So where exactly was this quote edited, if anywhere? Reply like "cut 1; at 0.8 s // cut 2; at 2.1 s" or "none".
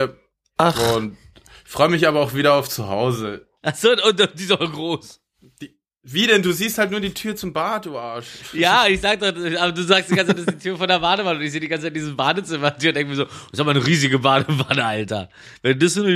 cut 1; at 3.6 s